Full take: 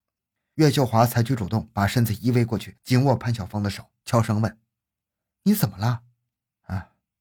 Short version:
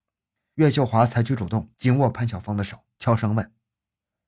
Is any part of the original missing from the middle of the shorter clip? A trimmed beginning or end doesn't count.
yes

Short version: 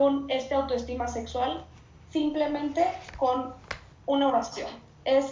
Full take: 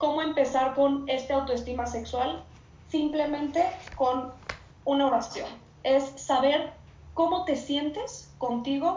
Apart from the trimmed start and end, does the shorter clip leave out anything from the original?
no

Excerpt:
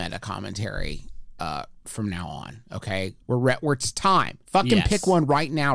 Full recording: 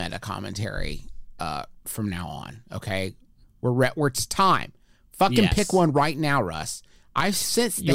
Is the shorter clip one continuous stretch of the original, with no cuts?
no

